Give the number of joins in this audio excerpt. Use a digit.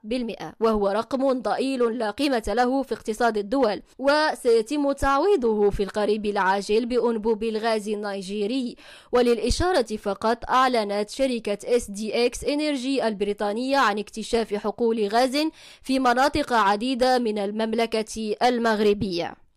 1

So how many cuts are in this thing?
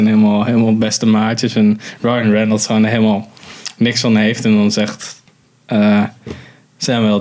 0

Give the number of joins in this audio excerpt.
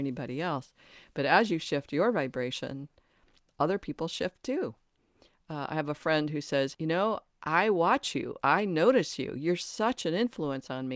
1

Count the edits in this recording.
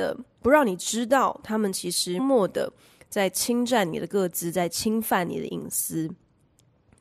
1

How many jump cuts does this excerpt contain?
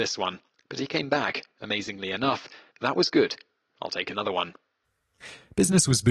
1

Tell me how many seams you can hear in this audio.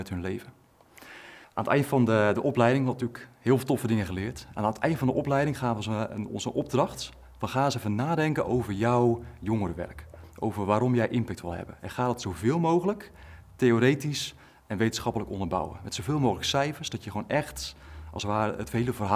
1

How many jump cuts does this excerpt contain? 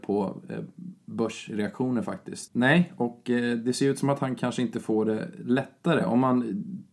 1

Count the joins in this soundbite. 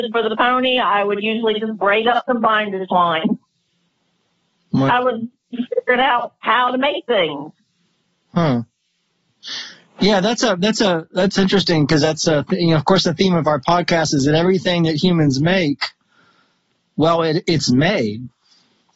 0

